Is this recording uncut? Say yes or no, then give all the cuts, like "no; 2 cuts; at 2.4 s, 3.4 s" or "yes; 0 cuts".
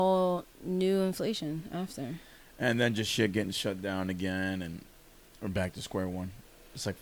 yes; 0 cuts